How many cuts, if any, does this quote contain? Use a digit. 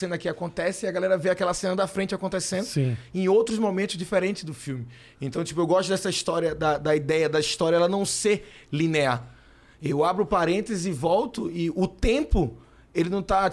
0